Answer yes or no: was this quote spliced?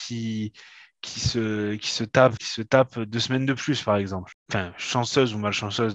yes